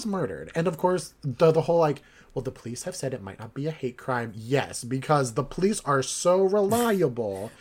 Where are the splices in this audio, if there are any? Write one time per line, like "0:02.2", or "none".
none